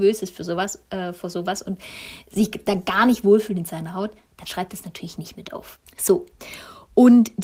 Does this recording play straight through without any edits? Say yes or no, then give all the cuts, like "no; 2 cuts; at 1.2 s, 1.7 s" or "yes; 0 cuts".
no; 1 cut; at 5.8 s